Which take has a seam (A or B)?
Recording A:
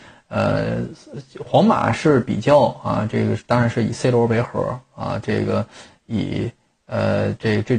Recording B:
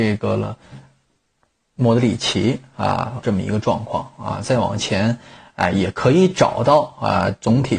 B